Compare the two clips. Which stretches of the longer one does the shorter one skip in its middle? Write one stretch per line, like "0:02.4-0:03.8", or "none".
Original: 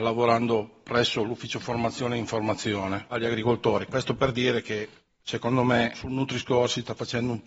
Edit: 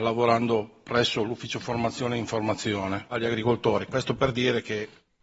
none